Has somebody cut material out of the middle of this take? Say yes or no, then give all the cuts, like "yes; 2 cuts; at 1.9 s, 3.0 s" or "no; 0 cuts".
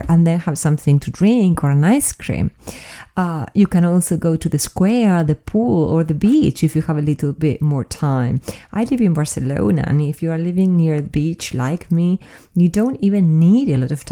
no; 0 cuts